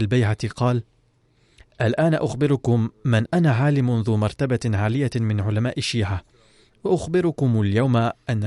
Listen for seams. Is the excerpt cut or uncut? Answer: cut